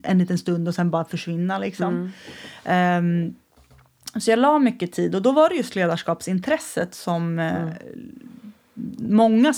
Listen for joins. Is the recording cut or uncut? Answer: uncut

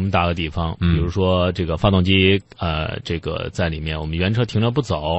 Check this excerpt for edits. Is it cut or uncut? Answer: uncut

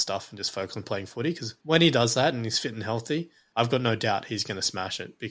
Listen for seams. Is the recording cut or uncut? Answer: cut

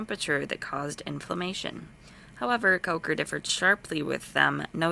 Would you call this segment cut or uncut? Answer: uncut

